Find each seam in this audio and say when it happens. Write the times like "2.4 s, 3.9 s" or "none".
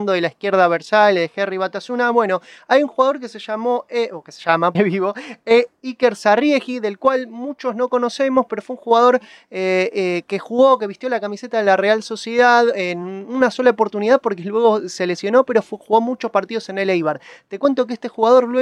4.7 s